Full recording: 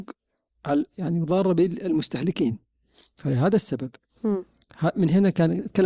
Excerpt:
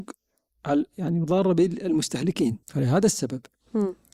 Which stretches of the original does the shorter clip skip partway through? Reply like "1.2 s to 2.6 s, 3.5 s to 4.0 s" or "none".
2.6 s to 3.1 s

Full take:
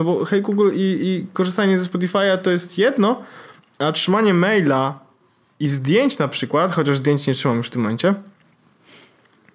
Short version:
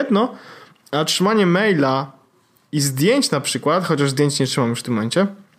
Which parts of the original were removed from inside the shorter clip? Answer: none

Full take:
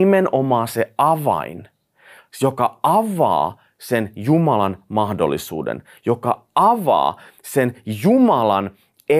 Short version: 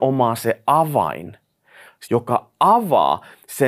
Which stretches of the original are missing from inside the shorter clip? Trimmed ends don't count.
2.4 s to 6.0 s

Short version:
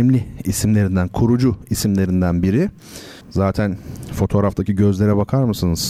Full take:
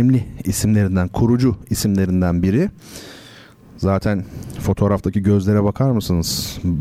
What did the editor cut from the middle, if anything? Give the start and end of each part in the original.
3.2 s to 3.7 s

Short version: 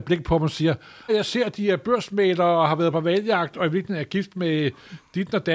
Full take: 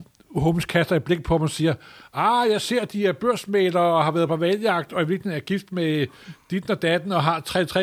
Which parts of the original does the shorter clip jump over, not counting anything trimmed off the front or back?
2.1 s to 2.4 s

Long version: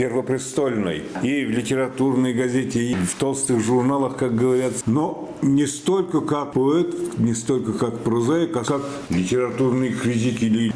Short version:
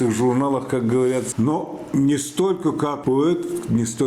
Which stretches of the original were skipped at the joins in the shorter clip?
none

